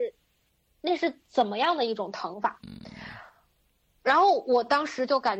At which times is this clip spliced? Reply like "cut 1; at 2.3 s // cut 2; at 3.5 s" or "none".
cut 1; at 2.6 s